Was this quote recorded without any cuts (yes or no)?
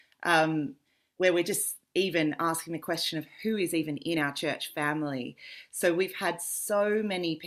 yes